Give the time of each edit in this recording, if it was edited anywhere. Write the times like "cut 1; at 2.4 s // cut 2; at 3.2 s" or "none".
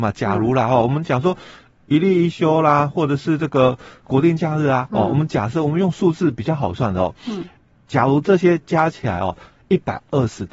none